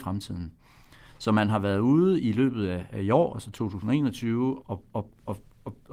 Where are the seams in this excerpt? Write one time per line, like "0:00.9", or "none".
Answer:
0:04.6